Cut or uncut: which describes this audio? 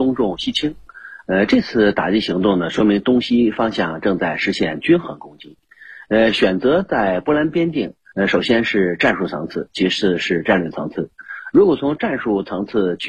cut